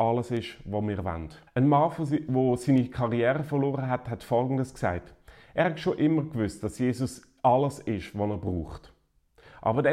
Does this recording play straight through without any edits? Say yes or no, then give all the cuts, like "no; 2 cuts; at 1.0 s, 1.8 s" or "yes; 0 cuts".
no; 1 cut; at 1.5 s